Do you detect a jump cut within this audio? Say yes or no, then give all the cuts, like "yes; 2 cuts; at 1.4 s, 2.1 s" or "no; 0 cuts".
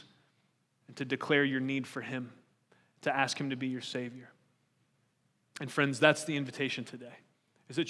no; 0 cuts